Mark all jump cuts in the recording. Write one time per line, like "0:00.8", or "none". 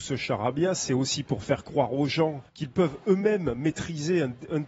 0:02.5